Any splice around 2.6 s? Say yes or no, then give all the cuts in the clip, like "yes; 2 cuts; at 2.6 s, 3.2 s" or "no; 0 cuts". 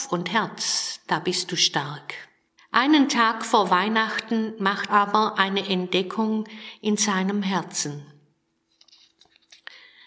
yes; 2 cuts; at 2.6 s, 4.9 s